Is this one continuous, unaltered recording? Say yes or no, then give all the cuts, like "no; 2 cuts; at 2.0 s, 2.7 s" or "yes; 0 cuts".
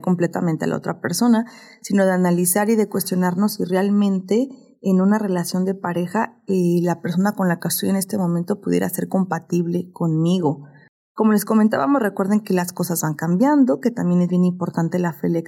yes; 0 cuts